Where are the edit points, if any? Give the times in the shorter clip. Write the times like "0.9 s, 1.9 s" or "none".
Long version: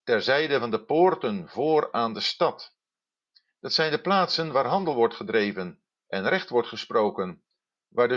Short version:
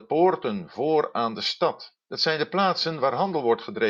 2.0 s

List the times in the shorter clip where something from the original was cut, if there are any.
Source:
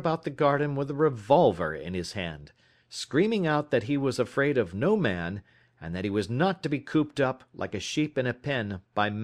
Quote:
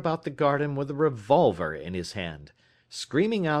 none

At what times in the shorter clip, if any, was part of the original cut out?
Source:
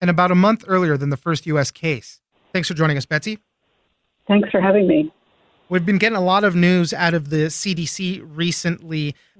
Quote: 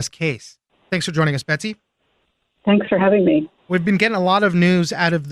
3.6 s

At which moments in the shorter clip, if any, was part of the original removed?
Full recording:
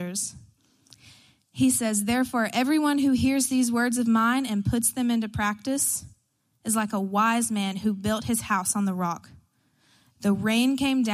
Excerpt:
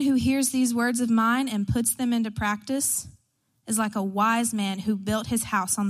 none

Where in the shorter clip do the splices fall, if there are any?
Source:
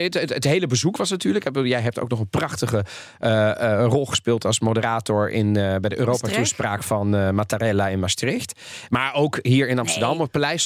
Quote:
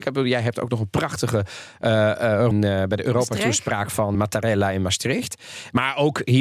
2.5 s, 4.1 s

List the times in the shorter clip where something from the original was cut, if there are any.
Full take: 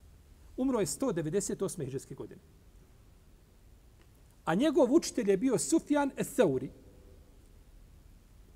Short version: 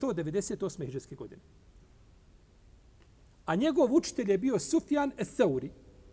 none

